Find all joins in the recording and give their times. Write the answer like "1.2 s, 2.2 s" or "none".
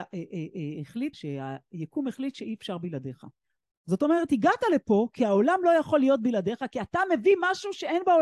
1.1 s, 3.7 s